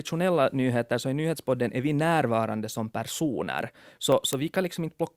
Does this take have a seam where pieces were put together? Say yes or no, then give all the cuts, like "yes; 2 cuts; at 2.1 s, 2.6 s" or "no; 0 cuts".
no; 0 cuts